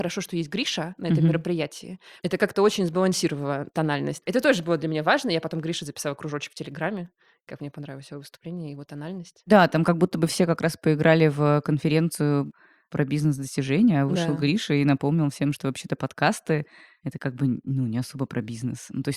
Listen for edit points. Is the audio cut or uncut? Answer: uncut